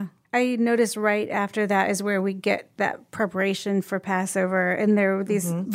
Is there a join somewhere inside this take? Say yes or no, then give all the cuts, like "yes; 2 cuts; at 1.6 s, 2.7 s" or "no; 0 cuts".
no; 0 cuts